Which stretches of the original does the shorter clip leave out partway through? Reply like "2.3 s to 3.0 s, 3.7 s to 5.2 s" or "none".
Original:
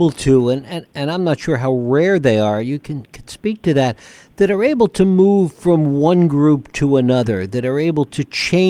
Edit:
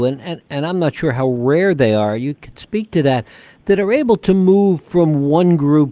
2.8 s to 3.1 s